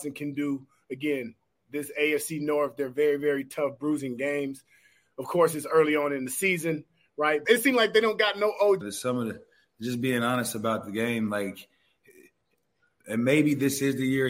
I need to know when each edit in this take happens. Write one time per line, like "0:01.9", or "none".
0:07.4
0:08.8